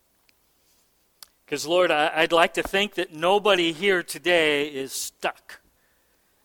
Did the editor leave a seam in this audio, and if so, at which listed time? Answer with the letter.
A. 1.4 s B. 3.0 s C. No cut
A